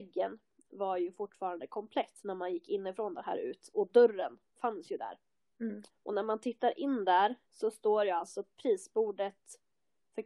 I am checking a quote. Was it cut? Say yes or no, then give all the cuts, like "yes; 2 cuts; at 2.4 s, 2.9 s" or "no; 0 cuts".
yes; 2 cuts; at 5.9 s, 7.4 s